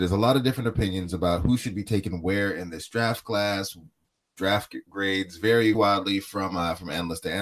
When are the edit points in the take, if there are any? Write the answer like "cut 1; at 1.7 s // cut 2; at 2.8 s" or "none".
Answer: cut 1; at 5.7 s